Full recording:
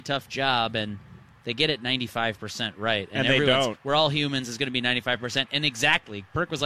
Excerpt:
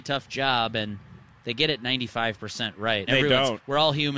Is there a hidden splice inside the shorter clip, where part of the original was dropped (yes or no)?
yes